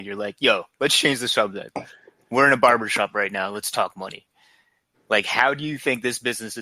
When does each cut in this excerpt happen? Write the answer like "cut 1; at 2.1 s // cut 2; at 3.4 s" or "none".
none